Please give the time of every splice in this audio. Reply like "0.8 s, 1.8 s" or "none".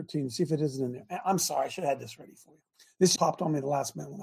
3.2 s